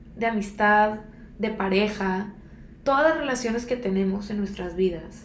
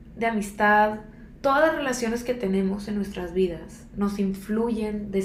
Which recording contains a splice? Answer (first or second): second